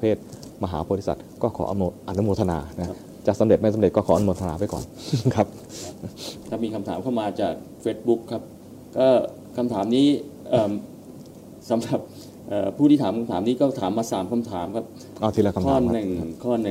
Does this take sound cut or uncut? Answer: uncut